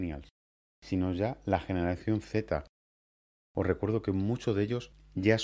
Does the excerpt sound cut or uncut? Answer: uncut